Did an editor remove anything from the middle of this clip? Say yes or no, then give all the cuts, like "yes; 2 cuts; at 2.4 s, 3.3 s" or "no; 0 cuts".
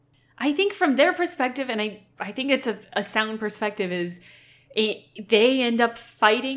no; 0 cuts